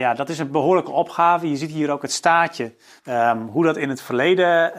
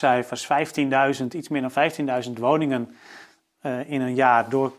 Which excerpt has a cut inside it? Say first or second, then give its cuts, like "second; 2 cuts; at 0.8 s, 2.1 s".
first; 1 cut; at 3.0 s